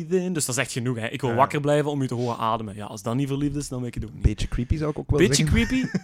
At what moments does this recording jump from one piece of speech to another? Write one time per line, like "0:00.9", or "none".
none